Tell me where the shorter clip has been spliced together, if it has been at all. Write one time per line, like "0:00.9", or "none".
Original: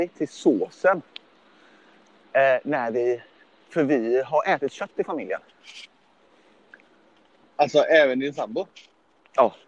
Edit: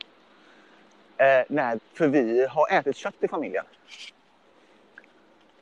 0:01.8